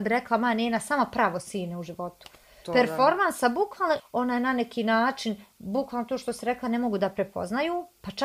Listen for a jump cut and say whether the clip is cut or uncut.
cut